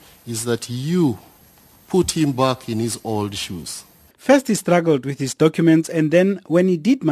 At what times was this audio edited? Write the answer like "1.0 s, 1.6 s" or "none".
4.1 s